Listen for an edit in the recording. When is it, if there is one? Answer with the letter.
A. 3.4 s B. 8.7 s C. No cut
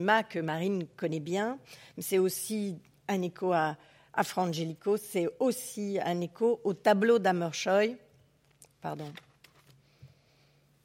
C